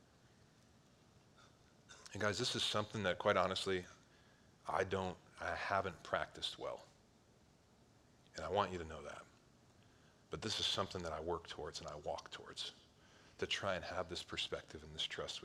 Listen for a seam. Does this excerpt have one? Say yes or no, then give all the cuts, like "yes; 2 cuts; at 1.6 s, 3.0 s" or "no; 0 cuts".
no; 0 cuts